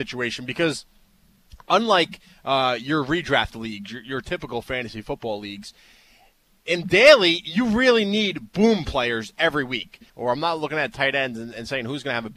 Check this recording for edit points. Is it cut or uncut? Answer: cut